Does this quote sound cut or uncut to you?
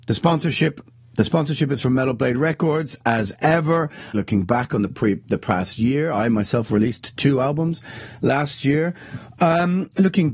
cut